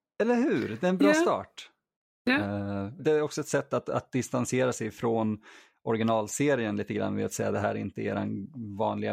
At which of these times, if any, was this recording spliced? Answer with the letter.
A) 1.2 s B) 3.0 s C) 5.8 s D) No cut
B